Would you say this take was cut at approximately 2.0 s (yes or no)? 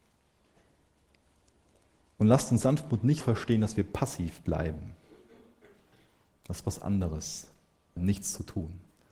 no